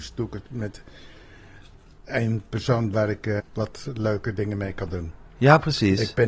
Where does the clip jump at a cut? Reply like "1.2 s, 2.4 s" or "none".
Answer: 3.4 s